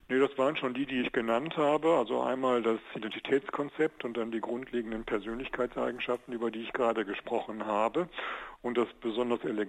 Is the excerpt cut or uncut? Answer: uncut